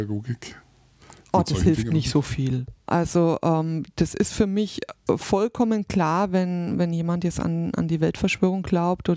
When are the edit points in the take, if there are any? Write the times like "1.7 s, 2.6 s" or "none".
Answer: 2.9 s